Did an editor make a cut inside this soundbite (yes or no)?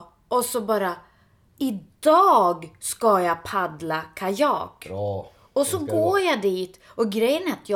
no